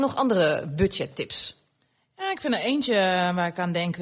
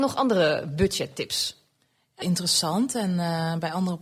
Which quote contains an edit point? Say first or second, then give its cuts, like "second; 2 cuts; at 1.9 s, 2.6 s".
second; 1 cut; at 2.2 s